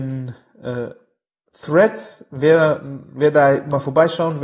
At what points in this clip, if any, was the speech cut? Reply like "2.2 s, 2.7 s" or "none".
none